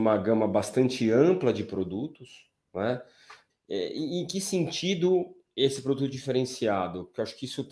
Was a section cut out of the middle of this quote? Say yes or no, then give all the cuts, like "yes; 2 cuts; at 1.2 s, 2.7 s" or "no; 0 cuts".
yes; 1 cut; at 3.5 s